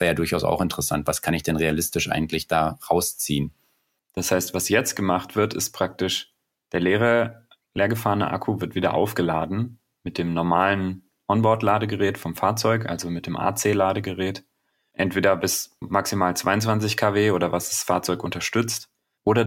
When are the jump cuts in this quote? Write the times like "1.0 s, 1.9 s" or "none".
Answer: 4.0 s, 15.8 s